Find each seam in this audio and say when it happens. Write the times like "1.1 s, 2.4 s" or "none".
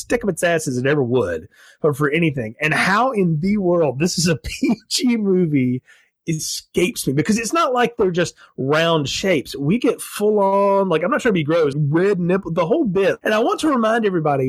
11.7 s, 13.2 s